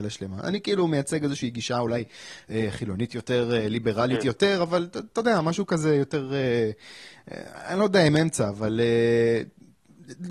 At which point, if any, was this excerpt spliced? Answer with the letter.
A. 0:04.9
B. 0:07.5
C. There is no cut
C